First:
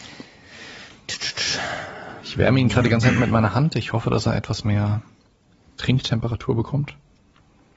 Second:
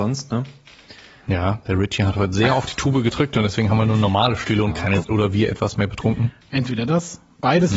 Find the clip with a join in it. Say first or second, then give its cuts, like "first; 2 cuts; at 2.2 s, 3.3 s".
second; 1 cut; at 5.0 s